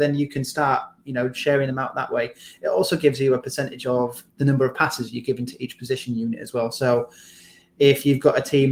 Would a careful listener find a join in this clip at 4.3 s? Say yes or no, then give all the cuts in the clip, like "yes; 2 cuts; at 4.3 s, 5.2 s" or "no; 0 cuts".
yes; 1 cut; at 4.3 s